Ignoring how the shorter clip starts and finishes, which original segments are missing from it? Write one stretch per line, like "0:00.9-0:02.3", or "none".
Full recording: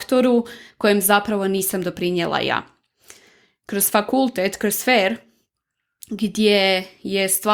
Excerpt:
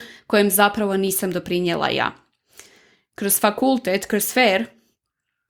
none